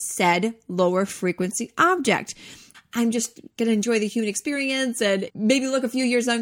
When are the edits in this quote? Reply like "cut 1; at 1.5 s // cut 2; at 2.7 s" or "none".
cut 1; at 2.7 s // cut 2; at 5.3 s